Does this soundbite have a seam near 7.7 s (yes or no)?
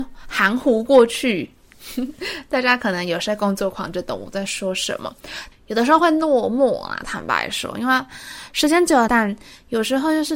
no